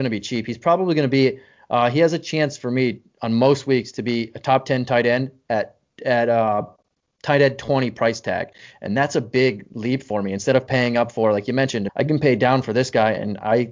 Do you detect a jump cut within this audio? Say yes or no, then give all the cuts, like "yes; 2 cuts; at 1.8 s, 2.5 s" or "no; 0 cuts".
yes; 1 cut; at 11.9 s